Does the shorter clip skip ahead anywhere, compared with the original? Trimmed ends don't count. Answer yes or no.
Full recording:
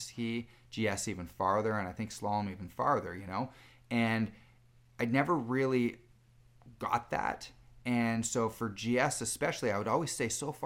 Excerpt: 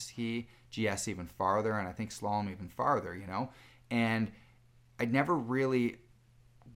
no